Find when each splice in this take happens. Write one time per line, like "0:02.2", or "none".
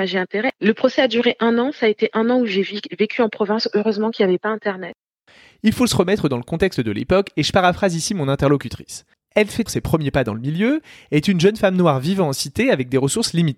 0:09.7